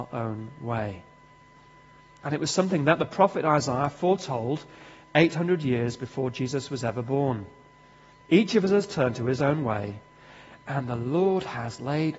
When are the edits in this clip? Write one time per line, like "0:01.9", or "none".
0:08.2